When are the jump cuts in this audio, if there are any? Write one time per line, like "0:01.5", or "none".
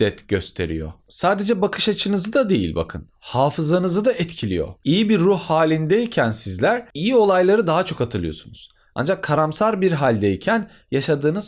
0:01.0

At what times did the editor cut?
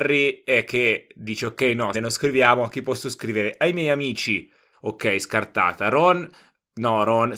0:01.9
0:04.7

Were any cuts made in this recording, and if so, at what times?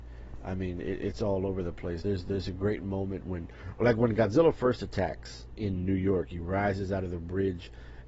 none

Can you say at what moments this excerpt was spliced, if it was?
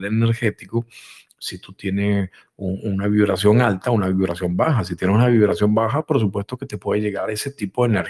none

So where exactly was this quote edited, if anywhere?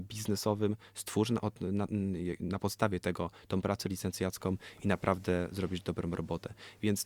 none

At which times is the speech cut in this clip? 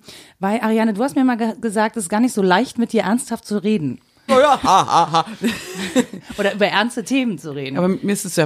0:04.3

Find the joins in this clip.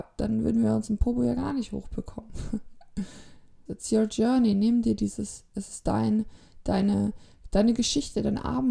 0:03.7

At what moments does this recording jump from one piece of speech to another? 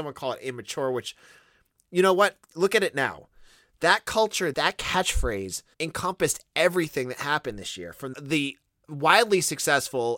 0:04.5
0:05.7
0:08.1

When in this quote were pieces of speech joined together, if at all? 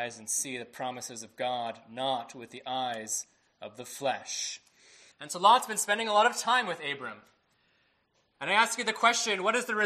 0:05.1

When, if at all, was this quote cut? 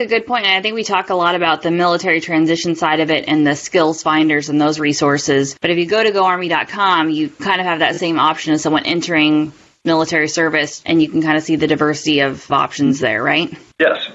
0:10.8

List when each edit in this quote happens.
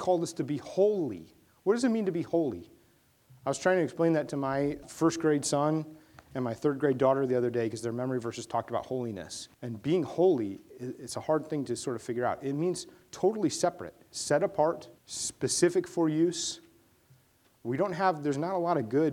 0:04.8
0:09.5
0:15.0

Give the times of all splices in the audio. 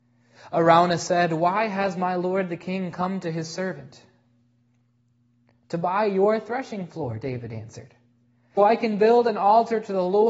0:08.6

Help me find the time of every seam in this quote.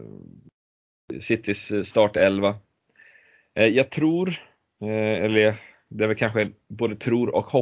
none

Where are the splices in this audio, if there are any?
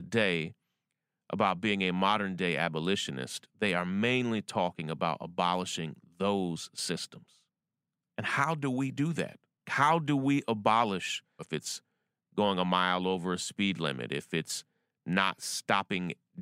0:09.6
0:11.4

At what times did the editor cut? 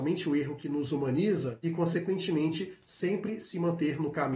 0:01.6

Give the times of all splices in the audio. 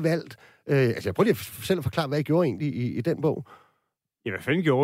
none

